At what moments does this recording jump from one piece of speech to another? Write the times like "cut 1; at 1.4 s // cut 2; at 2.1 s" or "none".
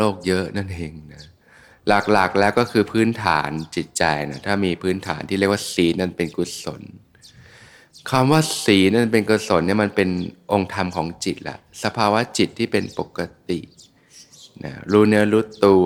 none